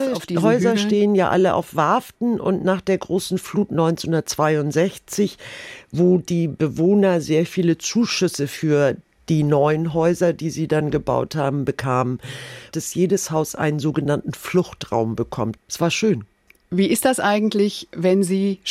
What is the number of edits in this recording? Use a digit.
2